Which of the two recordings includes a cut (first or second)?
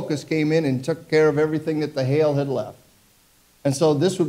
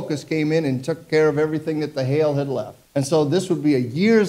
second